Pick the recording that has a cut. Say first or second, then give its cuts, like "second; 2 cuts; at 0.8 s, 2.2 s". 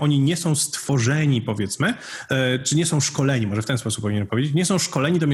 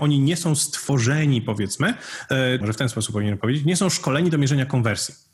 second; 1 cut; at 2.6 s